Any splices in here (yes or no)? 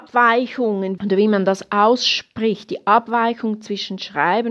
yes